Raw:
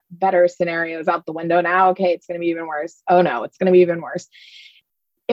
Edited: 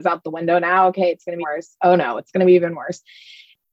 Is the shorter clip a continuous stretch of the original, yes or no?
no